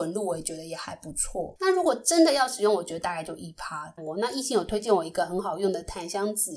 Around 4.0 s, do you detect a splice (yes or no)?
yes